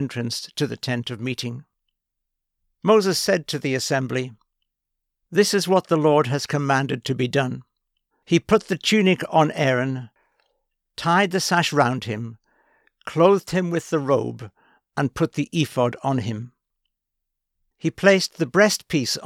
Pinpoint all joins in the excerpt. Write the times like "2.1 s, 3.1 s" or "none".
8.1 s, 17.6 s